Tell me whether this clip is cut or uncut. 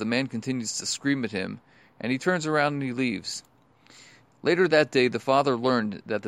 uncut